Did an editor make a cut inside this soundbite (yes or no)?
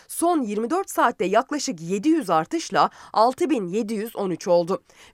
no